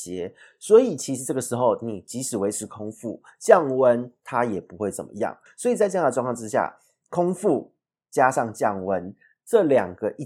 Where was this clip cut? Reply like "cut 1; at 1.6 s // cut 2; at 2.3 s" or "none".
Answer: cut 1; at 5.5 s